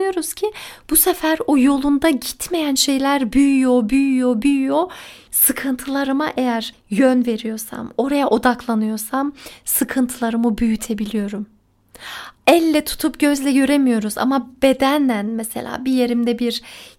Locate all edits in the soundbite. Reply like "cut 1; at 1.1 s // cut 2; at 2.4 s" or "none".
cut 1; at 5.3 s // cut 2; at 12.4 s